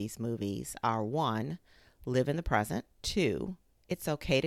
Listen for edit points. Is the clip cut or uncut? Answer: cut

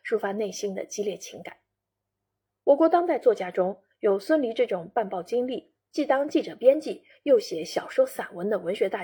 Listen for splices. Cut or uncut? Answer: uncut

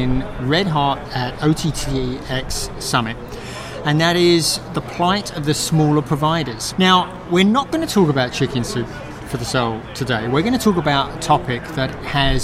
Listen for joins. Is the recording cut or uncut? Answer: cut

